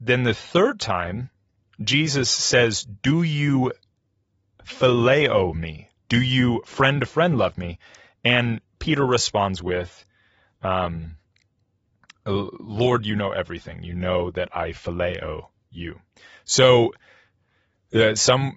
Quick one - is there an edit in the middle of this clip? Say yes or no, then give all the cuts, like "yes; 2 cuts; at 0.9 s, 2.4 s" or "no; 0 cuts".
no; 0 cuts